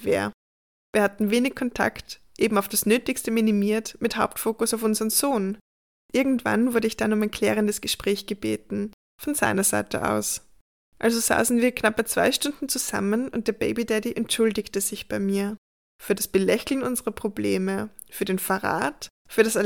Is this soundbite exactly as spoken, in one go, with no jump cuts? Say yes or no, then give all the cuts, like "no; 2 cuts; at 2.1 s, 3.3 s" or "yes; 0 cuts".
yes; 0 cuts